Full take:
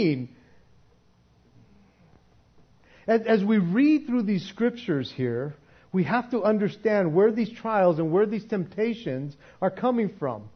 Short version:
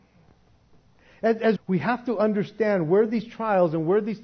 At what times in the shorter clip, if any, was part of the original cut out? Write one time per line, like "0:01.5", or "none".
0:01.6